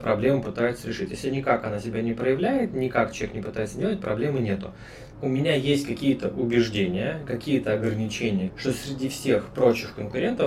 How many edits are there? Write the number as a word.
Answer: two